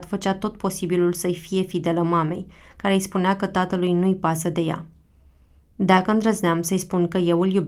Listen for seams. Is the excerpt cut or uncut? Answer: uncut